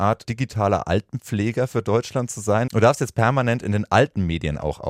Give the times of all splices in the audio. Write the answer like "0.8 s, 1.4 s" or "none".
2.7 s